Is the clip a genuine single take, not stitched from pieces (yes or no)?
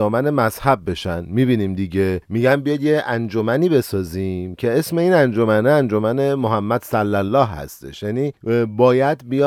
yes